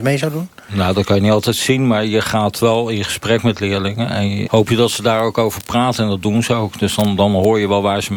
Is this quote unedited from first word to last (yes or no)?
no